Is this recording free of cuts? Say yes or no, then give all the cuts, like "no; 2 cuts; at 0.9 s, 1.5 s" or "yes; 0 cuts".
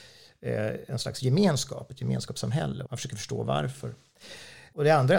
no; 1 cut; at 2.9 s